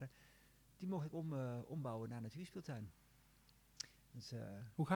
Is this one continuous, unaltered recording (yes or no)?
yes